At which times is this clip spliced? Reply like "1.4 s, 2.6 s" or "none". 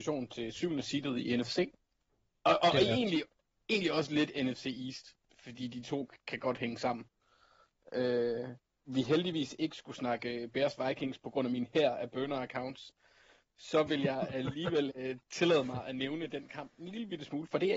8.8 s